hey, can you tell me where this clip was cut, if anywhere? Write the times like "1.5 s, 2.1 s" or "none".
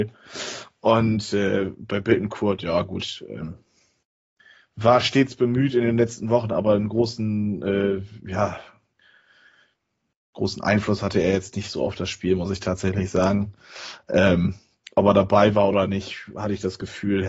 none